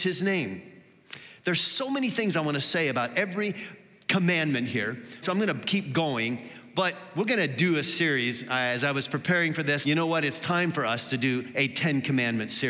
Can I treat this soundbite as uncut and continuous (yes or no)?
no